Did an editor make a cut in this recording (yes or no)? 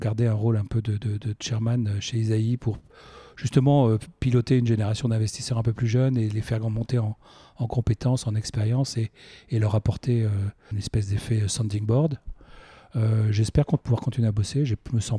yes